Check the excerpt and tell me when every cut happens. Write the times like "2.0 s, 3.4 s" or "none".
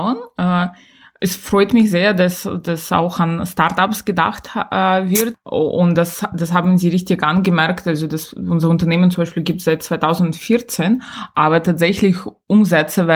none